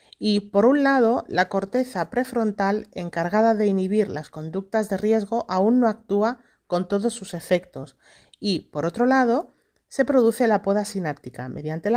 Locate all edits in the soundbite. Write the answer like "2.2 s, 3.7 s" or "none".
none